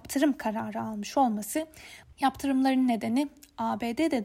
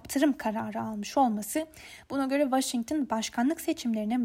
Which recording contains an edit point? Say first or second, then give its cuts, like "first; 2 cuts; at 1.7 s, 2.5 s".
first; 1 cut; at 2.0 s